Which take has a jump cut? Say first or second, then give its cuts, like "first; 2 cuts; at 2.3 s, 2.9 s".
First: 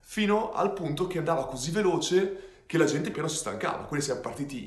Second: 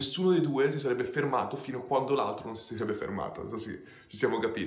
first; 1 cut; at 3.1 s